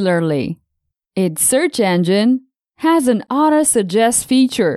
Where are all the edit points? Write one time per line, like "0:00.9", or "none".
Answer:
0:01.0